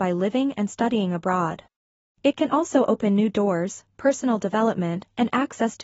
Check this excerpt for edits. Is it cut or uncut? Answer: cut